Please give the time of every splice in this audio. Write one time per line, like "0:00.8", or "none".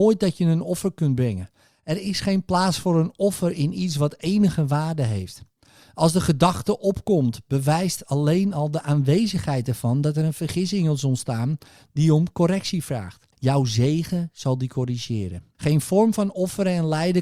0:13.3
0:15.5